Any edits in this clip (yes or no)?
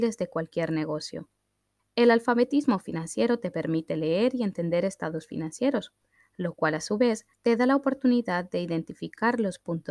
yes